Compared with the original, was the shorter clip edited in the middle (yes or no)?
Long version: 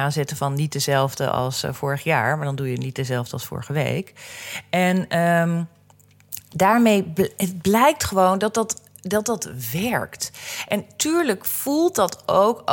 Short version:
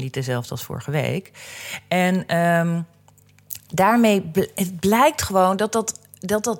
no